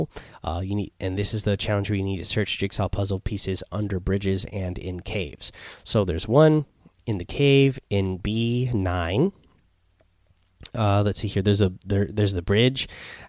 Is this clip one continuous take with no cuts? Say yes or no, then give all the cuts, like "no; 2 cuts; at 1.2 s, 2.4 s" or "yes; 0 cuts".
yes; 0 cuts